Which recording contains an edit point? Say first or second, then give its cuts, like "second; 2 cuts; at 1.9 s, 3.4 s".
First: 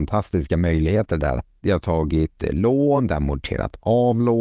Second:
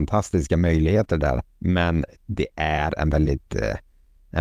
first; 1 cut; at 1.6 s